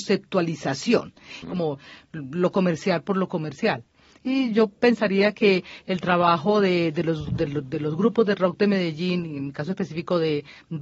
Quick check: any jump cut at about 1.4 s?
yes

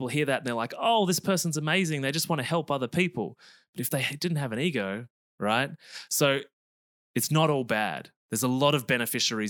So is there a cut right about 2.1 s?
no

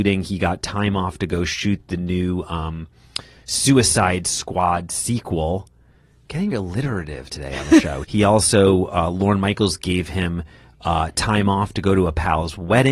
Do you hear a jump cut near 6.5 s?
yes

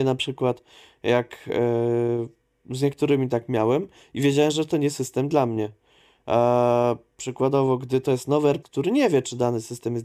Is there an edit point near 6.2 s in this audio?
no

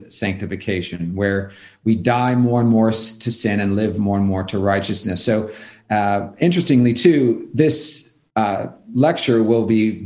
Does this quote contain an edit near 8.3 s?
yes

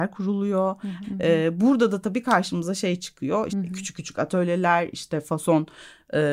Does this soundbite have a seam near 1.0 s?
yes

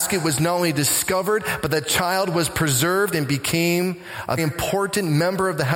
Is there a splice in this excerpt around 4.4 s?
yes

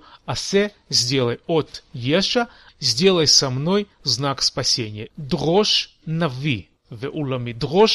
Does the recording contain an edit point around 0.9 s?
no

